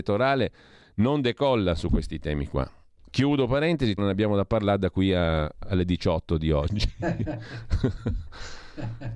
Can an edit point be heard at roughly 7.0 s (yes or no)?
no